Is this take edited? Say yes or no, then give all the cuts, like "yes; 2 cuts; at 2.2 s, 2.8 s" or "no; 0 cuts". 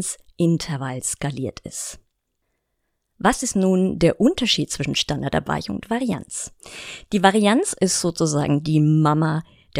no; 0 cuts